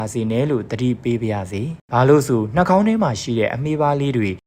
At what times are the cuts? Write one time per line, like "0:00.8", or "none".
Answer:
0:01.8